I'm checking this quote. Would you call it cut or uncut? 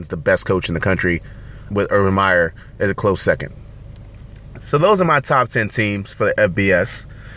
cut